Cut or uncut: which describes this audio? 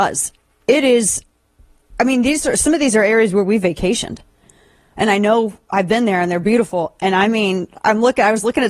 uncut